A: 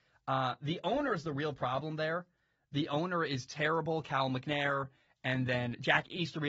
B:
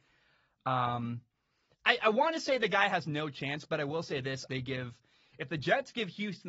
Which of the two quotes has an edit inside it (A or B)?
B